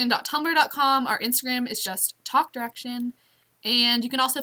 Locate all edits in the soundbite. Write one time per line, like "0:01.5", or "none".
none